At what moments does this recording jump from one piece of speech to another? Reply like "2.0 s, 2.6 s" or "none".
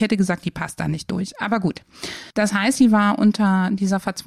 2.3 s